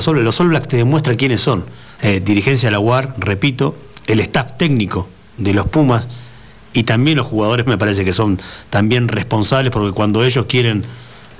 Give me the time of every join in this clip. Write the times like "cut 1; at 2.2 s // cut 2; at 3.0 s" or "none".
cut 1; at 2.0 s // cut 2; at 7.7 s